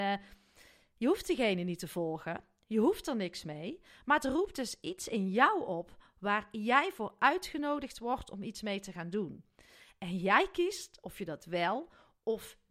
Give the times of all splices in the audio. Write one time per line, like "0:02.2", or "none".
none